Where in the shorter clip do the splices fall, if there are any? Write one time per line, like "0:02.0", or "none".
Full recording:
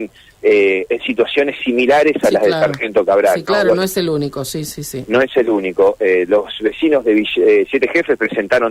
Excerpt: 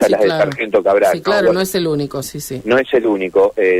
0:02.2